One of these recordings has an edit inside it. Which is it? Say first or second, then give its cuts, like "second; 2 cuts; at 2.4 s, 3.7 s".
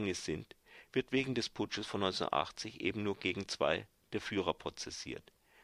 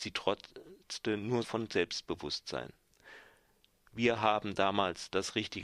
second; 1 cut; at 1.4 s